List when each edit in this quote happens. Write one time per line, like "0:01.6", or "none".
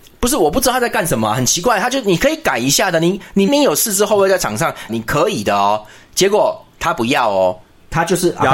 0:03.5
0:04.9